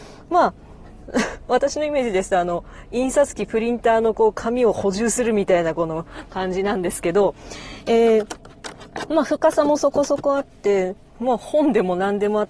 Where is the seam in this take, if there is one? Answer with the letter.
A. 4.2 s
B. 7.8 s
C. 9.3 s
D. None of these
D